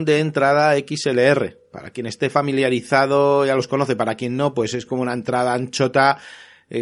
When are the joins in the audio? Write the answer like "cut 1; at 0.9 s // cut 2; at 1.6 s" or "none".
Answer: none